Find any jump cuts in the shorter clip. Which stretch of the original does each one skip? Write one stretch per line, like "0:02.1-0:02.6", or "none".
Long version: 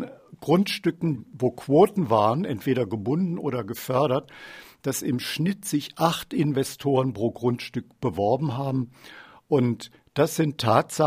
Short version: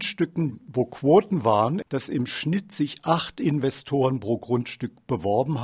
0:02.5-0:04.8